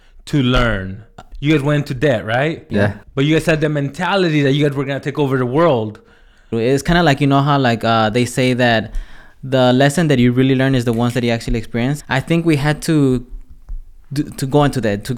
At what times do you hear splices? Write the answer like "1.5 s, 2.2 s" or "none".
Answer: 1.3 s, 6.5 s, 12.0 s

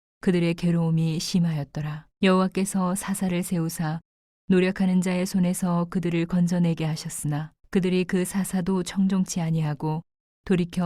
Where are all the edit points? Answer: 2.1 s, 7.6 s

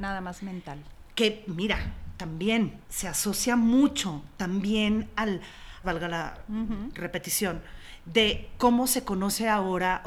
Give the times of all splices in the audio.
2.8 s, 5.8 s

